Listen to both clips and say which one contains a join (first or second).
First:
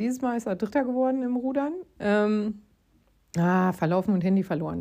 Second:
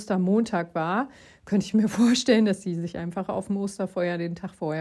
first